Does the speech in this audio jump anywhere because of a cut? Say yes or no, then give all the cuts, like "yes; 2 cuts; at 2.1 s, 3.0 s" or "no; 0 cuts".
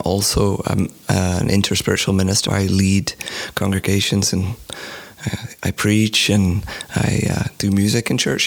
yes; 1 cut; at 2.5 s